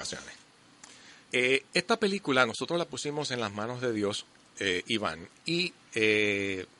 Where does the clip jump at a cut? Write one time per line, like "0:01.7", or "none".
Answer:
0:01.3